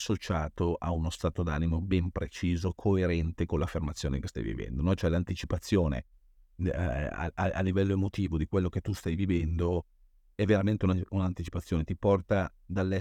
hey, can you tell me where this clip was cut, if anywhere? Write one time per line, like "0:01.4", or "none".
none